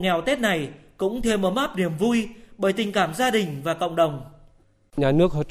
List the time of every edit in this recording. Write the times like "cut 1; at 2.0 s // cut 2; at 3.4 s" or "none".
none